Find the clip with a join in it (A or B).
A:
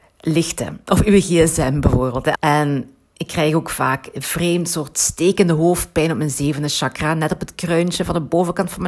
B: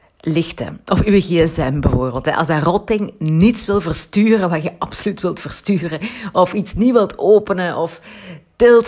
A